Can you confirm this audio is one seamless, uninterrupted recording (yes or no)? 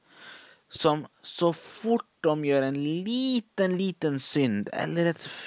yes